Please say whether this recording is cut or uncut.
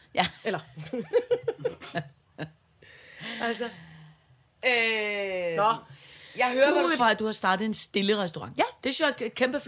cut